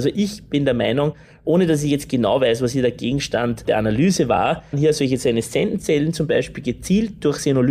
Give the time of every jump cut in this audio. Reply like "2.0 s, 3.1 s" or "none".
4.7 s